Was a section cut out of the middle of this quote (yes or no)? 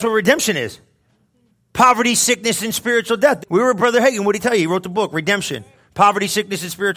yes